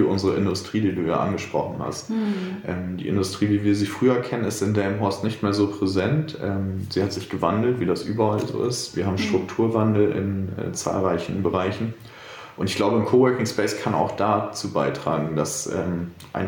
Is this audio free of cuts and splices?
yes; 0 cuts

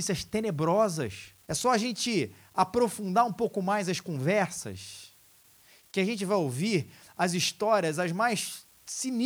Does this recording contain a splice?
yes; 1 cut; at 1.4 s

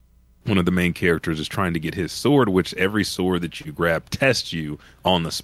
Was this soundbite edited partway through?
no; 0 cuts

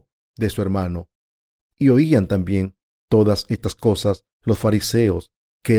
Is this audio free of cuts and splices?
no; 1 cut; at 1.6 s

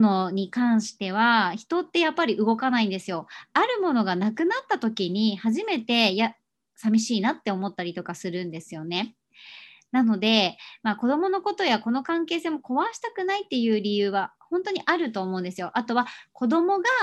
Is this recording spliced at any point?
no; 0 cuts

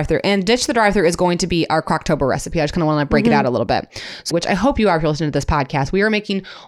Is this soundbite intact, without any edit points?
no; 1 cut; at 4.3 s

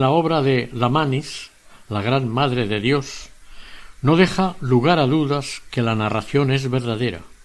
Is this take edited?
no; 0 cuts

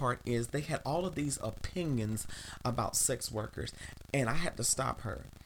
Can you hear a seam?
no; 0 cuts

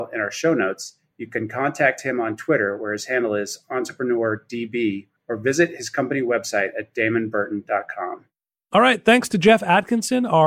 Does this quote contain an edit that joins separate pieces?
no; 0 cuts

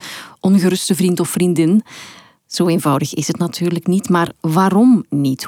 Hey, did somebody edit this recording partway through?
no; 0 cuts

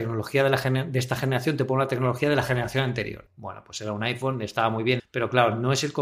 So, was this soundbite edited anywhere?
yes; 2 cuts; at 3.3 s, 5.0 s

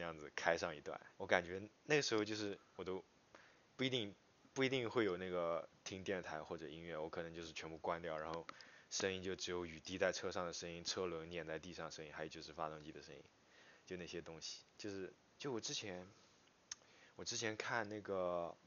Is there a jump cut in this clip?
yes; 2 cuts; at 1.1 s, 15.3 s

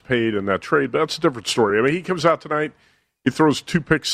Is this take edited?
no; 0 cuts

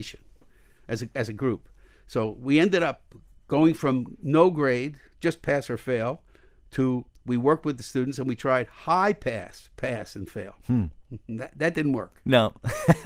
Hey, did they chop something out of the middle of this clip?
no; 0 cuts

